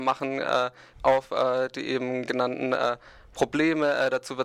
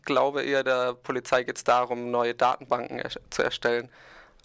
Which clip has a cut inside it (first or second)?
first